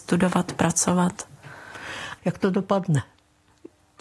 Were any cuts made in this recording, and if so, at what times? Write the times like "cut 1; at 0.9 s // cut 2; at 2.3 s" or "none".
cut 1; at 2.2 s